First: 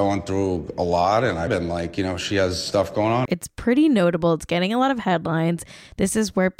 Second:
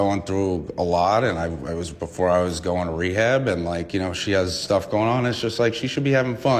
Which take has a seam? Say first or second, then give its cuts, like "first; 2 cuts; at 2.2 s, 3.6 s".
first; 2 cuts; at 1.5 s, 3.3 s